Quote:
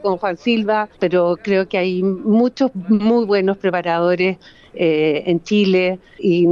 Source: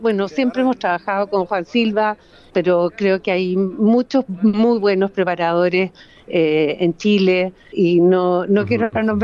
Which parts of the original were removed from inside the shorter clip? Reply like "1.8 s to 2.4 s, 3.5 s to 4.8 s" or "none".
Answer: 2.2 s to 2.5 s